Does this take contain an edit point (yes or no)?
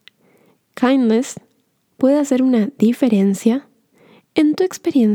yes